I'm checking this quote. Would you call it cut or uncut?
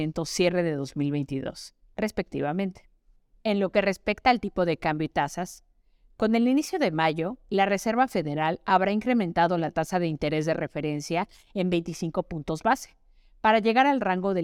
uncut